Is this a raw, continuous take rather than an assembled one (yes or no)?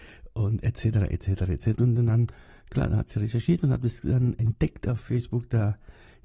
no